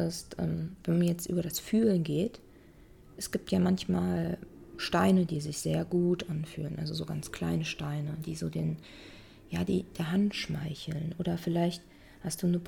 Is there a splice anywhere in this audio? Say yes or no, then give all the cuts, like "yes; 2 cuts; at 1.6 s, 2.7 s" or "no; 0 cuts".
no; 0 cuts